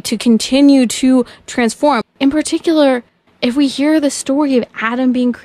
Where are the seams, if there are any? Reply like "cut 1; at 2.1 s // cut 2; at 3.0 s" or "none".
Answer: cut 1; at 2.0 s